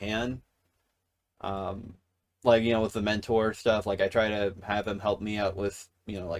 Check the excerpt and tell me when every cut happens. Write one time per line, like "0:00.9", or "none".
none